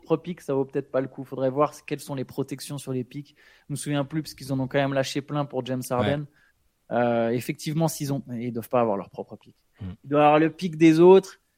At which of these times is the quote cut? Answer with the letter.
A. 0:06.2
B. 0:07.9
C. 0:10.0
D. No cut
D